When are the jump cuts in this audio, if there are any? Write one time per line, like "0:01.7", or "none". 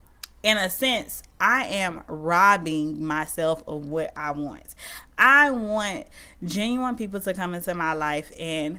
none